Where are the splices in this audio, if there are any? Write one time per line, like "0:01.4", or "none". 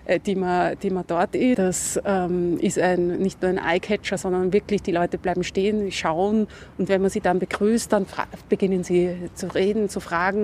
0:01.5